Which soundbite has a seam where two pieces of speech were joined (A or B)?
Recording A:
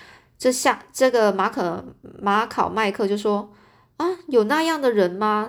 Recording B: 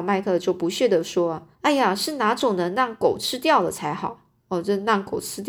B